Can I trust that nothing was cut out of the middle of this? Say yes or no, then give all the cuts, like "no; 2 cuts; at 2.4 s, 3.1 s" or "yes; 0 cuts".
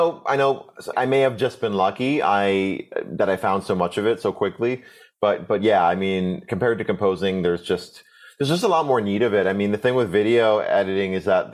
no; 1 cut; at 0.9 s